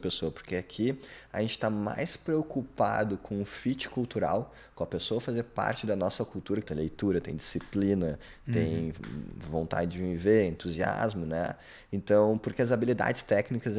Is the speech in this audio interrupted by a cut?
yes; 1 cut; at 6.6 s

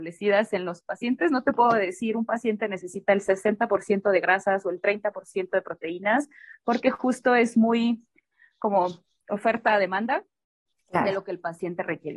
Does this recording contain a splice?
no; 0 cuts

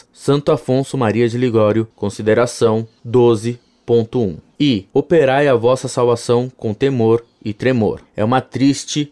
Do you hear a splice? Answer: yes; 2 cuts; at 1.9 s, 8.0 s

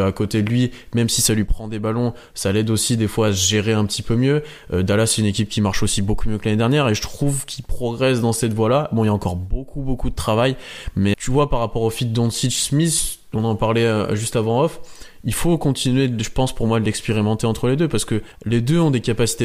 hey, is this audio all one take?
no; 1 cut; at 11.1 s

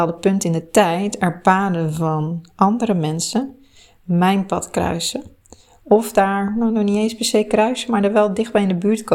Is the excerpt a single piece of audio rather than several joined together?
yes; 0 cuts

